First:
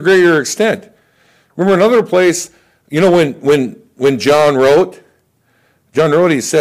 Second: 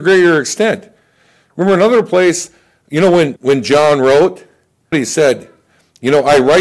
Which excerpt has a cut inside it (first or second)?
second